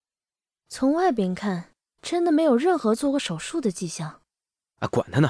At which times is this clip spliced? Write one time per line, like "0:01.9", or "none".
none